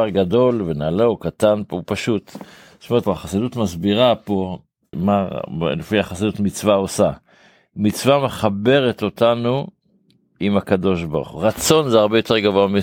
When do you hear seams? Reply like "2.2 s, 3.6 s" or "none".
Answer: 3.0 s, 4.9 s, 11.4 s